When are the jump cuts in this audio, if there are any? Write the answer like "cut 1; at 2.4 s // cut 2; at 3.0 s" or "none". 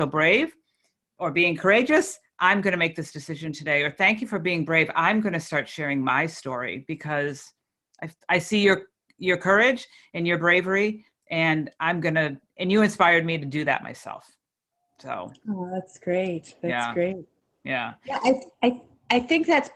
none